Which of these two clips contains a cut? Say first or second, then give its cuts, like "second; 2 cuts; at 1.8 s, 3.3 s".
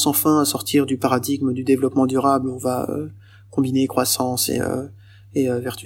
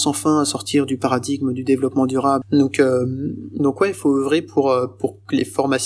second; 1 cut; at 2.4 s